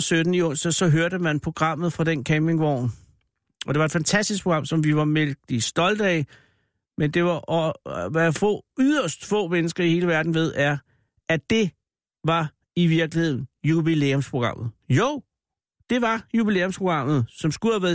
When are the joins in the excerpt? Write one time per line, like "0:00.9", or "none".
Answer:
none